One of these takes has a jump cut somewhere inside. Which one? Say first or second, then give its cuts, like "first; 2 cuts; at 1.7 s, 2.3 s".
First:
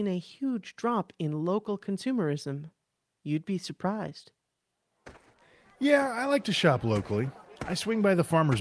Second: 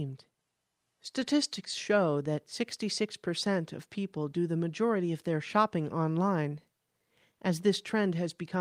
first; 1 cut; at 3.1 s